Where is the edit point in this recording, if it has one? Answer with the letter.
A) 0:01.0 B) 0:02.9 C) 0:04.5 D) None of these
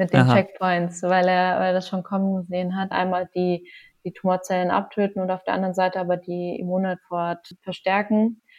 B